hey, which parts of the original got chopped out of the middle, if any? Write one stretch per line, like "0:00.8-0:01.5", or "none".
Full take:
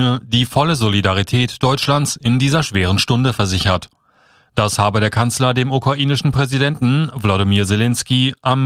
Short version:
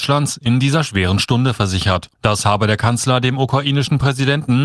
0:03.9-0:04.5